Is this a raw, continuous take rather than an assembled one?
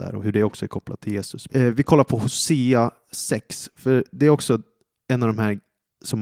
no; 1 cut; at 1.5 s

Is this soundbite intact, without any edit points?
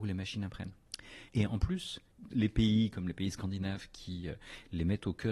no; 1 cut; at 1.3 s

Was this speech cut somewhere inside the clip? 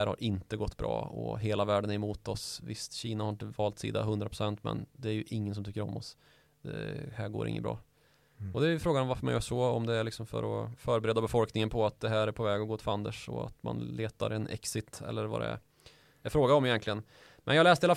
no; 0 cuts

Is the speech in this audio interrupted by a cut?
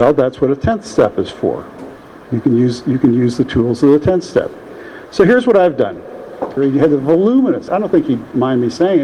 yes; 2 cuts; at 6.6 s, 7.7 s

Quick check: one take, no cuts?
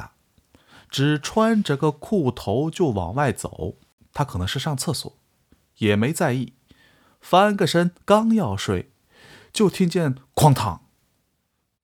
no; 1 cut; at 4.0 s

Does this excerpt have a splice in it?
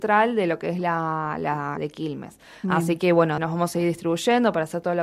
yes; 2 cuts; at 1.8 s, 3.4 s

